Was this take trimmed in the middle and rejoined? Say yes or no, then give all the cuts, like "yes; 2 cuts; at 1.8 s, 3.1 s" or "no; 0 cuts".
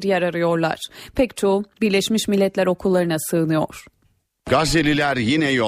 no; 0 cuts